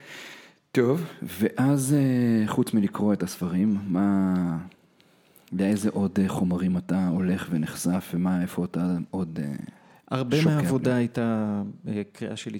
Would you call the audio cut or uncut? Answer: uncut